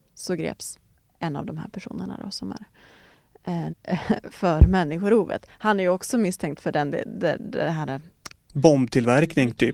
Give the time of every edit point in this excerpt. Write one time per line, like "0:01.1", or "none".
0:03.7